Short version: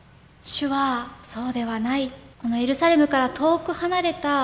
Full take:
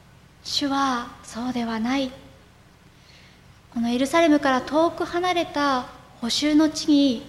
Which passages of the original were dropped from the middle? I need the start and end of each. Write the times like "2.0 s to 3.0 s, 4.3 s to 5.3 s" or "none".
2.3 s to 3.6 s

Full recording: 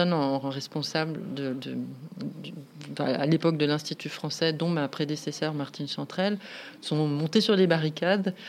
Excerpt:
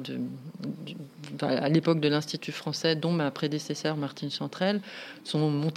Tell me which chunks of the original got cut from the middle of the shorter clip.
none

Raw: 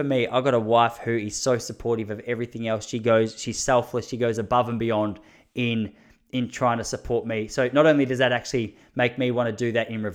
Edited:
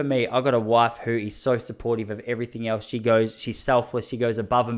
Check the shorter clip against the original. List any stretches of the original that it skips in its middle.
none

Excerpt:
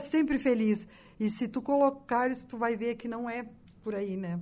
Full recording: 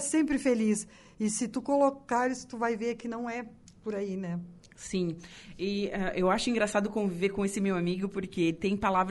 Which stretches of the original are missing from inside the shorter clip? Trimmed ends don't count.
none

